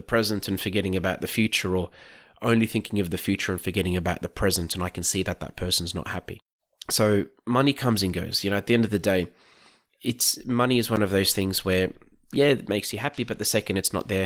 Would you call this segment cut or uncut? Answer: uncut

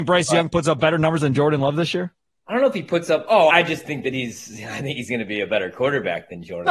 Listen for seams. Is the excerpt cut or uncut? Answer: cut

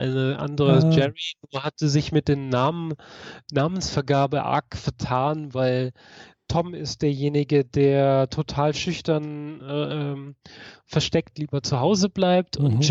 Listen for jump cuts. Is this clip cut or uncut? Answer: uncut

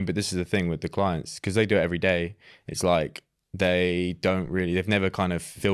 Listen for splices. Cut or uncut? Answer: uncut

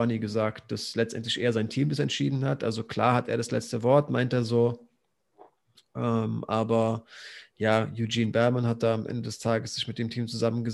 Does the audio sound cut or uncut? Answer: uncut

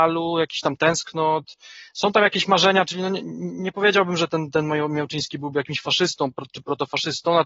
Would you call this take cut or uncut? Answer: uncut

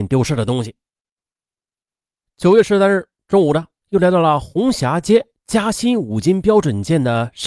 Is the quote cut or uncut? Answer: cut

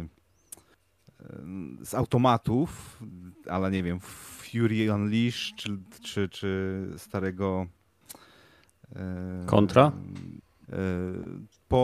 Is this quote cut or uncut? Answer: cut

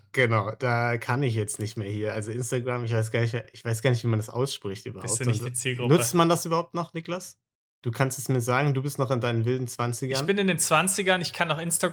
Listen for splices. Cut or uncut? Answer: uncut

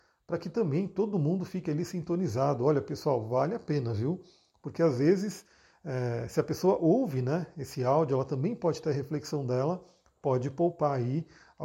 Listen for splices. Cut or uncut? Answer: uncut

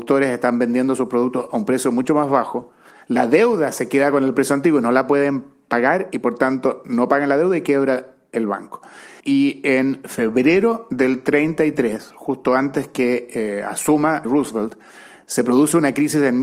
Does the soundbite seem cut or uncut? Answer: cut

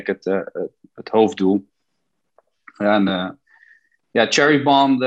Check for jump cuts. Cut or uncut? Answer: uncut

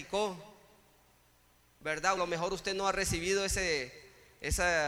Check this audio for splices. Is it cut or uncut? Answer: cut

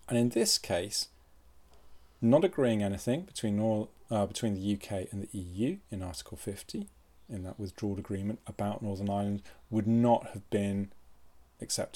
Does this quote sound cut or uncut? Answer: uncut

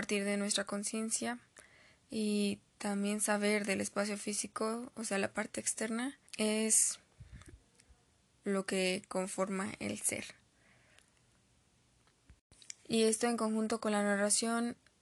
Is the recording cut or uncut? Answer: cut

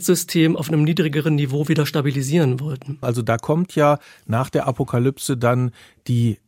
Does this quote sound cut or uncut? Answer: cut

